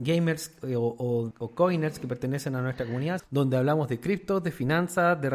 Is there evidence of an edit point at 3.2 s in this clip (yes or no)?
yes